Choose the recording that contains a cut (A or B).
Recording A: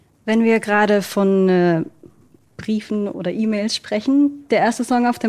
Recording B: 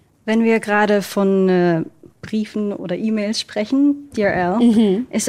B